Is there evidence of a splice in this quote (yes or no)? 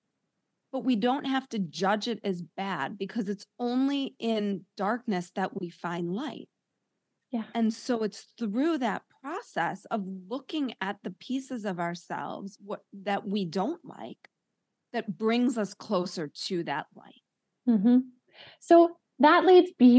no